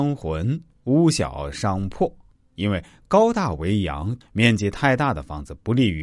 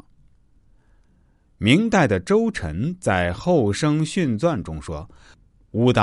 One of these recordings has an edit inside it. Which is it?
first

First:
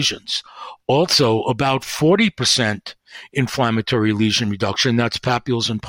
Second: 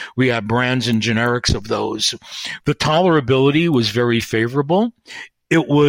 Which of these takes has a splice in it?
second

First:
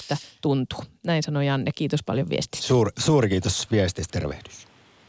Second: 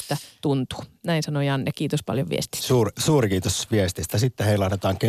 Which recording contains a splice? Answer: first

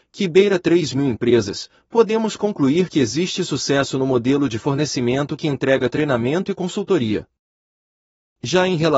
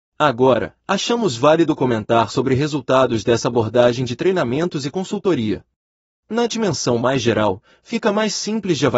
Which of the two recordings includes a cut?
second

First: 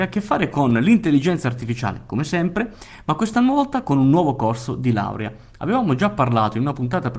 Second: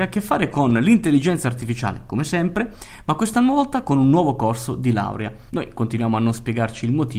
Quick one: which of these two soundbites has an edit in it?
second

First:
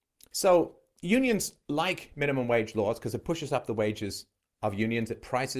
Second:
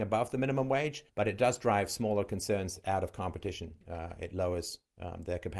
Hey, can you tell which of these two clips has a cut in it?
second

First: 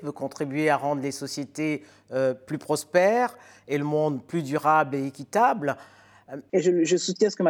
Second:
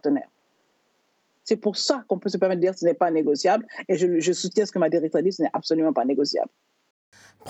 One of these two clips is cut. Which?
first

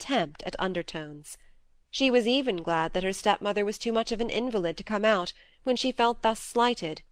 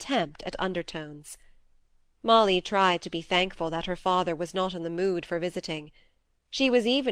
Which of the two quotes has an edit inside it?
first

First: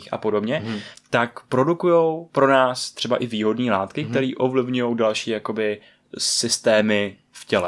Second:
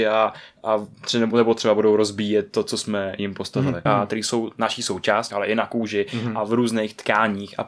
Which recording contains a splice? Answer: second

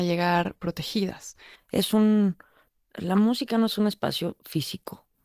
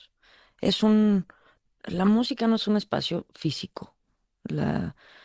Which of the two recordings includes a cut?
first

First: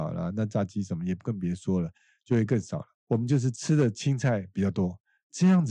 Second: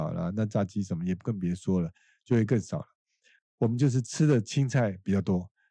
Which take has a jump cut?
first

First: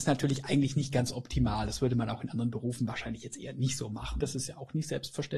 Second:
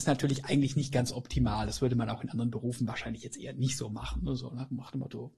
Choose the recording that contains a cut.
first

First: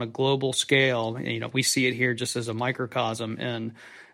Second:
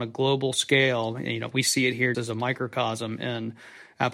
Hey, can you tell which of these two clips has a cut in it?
second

